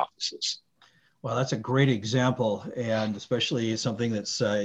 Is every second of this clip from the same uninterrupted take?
yes; 0 cuts

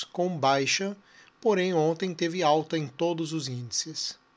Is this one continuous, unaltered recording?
yes; 0 cuts

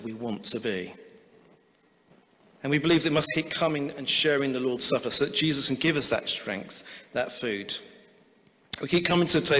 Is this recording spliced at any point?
no; 0 cuts

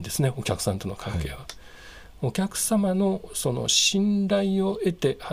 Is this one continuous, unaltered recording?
yes; 0 cuts

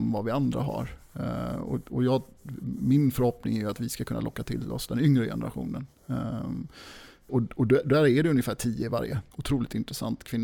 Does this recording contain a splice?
yes; 2 cuts; at 7.3 s, 9.3 s

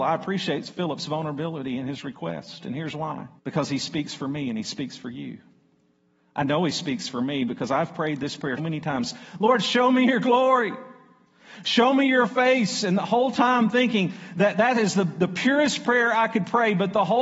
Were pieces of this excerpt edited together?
yes; 2 cuts; at 3.4 s, 8.6 s

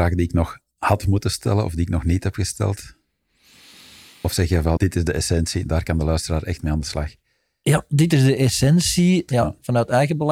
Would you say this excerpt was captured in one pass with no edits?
no; 2 cuts; at 4.8 s, 9.3 s

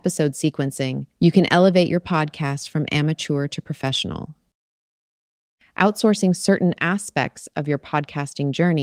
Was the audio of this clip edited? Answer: yes; 1 cut; at 1.1 s

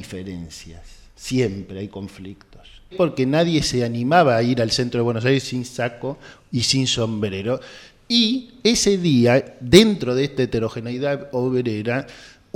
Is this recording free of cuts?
no; 1 cut; at 2.9 s

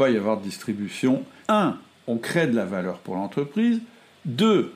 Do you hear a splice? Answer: yes; 1 cut; at 1.4 s

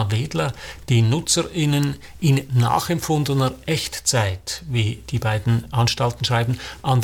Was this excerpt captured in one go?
yes; 0 cuts

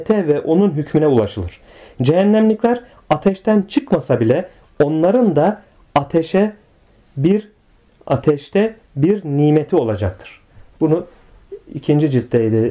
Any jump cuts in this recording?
no; 0 cuts

